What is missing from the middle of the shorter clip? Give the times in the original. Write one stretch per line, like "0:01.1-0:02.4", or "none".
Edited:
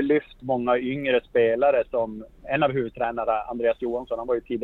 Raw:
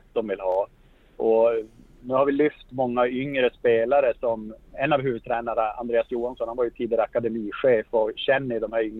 none

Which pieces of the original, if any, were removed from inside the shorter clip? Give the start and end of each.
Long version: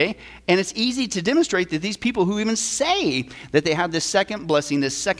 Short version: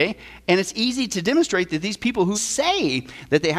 0:02.3-0:02.6

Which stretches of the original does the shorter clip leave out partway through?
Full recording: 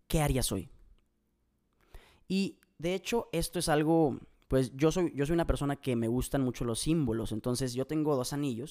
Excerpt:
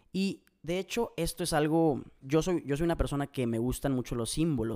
0:04.4-0:04.7

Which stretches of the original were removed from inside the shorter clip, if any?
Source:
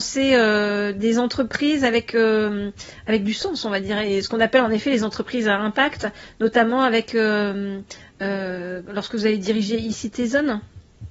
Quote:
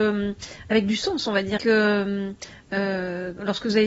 0:03.9-0:07.1

